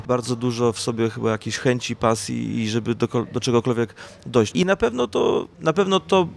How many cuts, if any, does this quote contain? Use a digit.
1